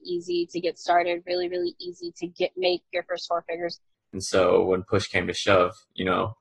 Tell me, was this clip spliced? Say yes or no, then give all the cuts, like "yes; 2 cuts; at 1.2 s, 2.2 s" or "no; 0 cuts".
yes; 1 cut; at 3.9 s